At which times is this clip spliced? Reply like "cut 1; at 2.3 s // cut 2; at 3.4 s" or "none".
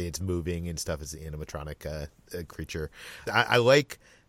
cut 1; at 3.3 s